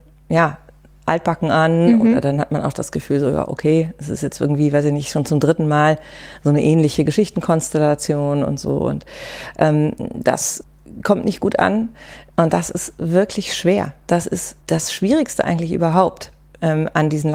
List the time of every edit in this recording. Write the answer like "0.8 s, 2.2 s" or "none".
12.3 s, 14.6 s